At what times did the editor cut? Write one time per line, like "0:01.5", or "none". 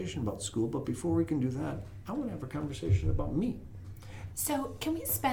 0:04.3